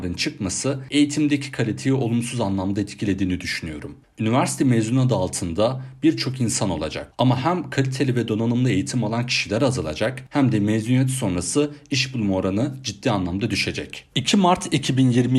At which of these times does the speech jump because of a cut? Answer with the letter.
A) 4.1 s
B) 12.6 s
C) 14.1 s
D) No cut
C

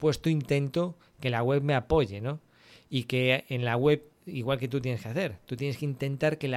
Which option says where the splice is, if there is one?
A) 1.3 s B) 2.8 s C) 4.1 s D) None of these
C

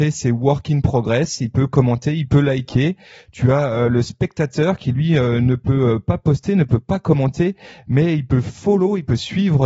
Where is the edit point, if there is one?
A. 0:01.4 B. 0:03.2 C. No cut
C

